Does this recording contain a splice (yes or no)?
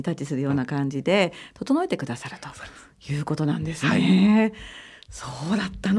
no